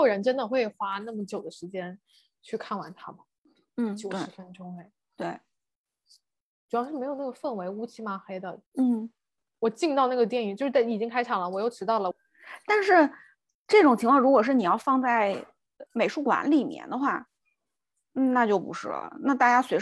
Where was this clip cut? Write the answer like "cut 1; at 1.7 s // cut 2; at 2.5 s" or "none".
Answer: cut 1; at 8.7 s // cut 2; at 12.1 s // cut 3; at 15.9 s